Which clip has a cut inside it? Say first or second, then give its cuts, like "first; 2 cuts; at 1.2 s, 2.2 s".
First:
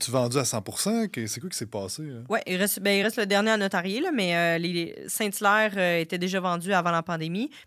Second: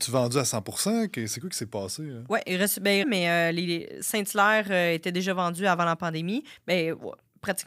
second; 1 cut; at 3.0 s